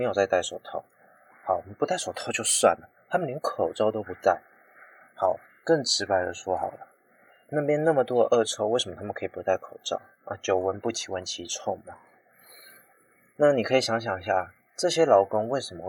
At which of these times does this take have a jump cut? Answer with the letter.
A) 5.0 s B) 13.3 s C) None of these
C